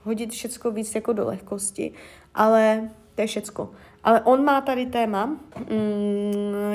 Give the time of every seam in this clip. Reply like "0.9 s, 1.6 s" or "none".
5.5 s